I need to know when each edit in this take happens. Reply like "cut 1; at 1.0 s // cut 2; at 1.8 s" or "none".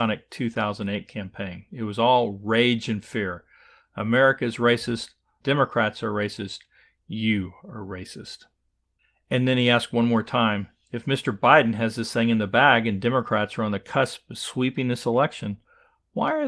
cut 1; at 5.4 s